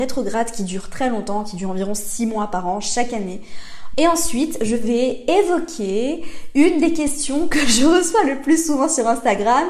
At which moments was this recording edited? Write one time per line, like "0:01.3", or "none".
0:03.9